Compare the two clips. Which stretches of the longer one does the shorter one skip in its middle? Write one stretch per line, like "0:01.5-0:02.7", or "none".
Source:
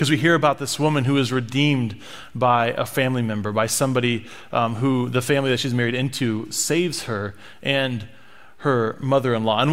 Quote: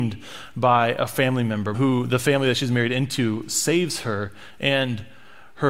0:03.5-0:04.8

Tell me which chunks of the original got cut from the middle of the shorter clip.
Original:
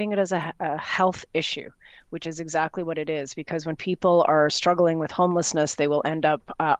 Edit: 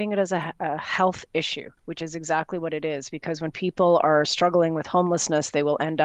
0:01.8-0:02.0

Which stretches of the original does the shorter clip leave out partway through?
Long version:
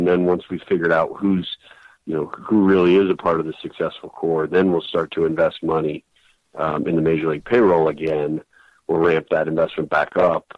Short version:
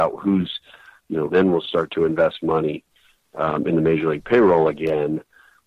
0:02.3-0:04.5

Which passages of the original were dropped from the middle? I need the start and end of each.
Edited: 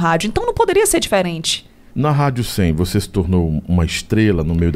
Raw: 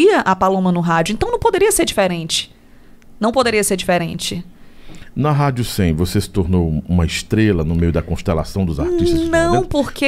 0:02.8-0:05.1

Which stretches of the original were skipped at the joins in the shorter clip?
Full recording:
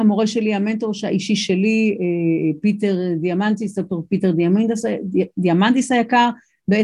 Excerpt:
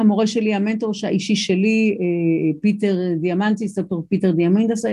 none

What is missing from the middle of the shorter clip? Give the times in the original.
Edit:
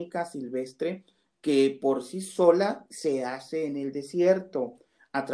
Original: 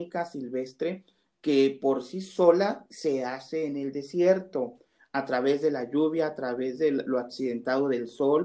none

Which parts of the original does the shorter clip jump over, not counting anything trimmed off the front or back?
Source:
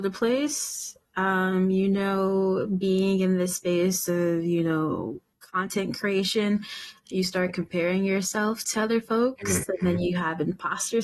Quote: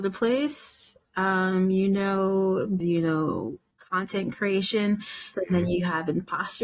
0:02.8-0:04.4
0:07.0-0:09.7

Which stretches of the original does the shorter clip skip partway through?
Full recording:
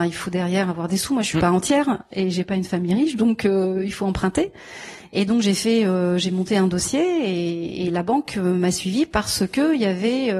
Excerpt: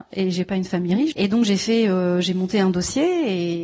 0:03.1-0:05.1

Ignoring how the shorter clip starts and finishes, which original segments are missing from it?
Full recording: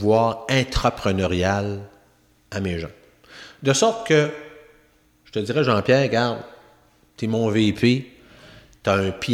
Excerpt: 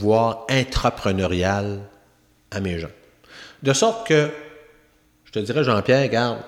none

